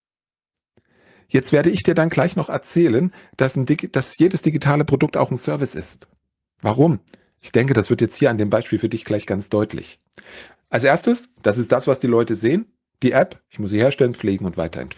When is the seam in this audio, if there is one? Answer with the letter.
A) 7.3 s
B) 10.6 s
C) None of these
B